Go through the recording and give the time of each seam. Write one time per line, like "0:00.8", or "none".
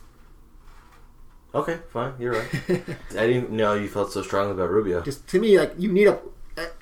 0:03.1
0:05.0